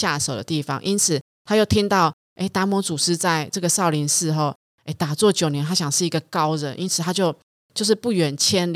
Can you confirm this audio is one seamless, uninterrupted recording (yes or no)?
yes